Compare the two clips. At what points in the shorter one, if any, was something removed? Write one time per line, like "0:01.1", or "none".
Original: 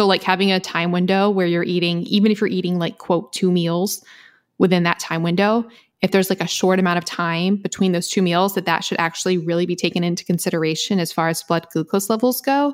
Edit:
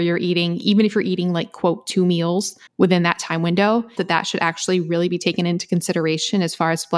0:02.7
0:04.0